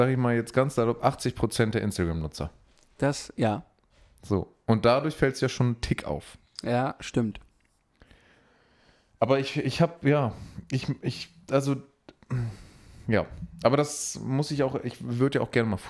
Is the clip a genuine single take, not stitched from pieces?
yes; 0 cuts

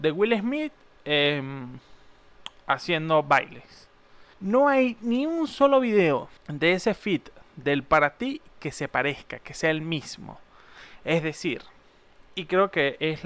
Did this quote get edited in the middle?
yes; 2 cuts; at 4.3 s, 6.4 s

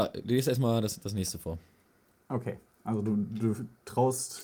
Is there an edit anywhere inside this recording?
no; 0 cuts

